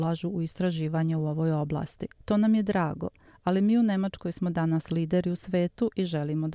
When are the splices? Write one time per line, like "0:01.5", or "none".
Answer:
0:02.2